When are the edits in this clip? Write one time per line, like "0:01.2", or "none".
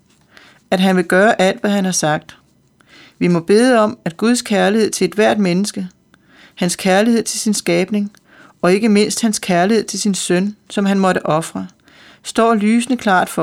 none